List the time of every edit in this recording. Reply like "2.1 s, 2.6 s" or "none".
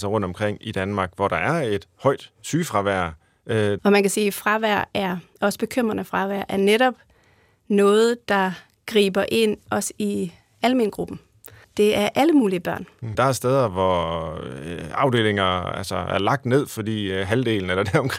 3.8 s, 11.6 s, 13.1 s

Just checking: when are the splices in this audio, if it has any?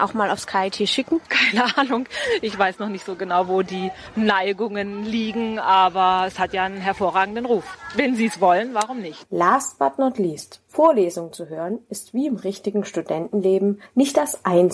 none

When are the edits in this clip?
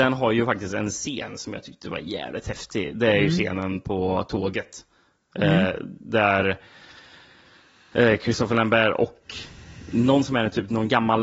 none

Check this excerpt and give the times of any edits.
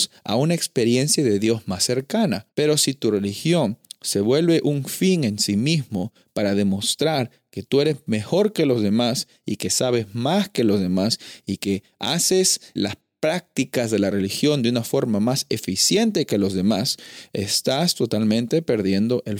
2.5 s, 12.8 s

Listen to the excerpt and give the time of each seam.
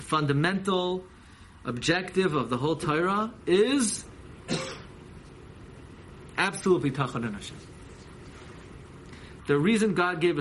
9.4 s

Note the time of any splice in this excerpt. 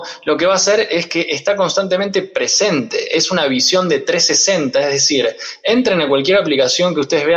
none

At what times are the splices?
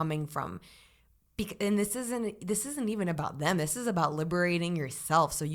none

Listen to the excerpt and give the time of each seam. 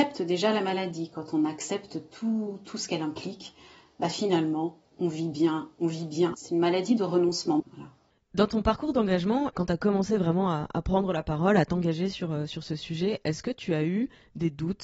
6.3 s, 7.6 s, 9.5 s

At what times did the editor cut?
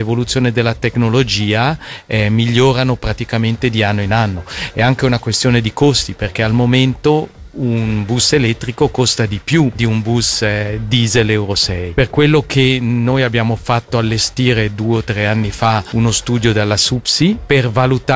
none

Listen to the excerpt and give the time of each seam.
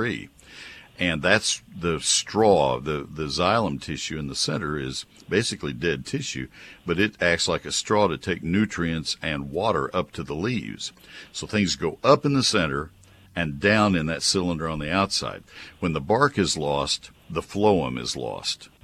none

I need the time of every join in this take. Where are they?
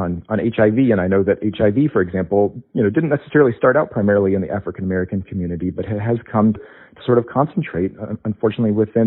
6.6 s

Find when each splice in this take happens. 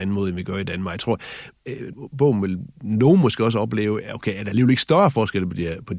1.9 s

